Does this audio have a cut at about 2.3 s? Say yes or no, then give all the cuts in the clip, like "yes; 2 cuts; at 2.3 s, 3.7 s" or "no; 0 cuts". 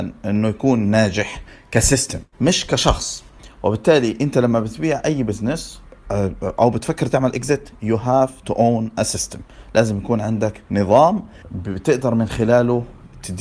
yes; 1 cut; at 2.3 s